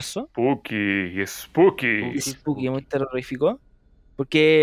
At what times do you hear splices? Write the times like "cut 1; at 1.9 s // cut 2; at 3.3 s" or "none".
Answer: none